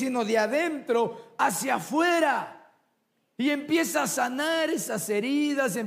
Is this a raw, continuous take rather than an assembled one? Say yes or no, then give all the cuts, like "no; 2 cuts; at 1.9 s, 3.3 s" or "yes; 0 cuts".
yes; 0 cuts